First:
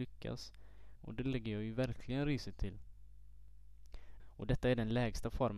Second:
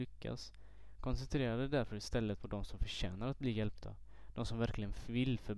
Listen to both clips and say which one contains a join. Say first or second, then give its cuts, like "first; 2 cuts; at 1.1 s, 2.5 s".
first; 2 cuts; at 1.0 s, 4.2 s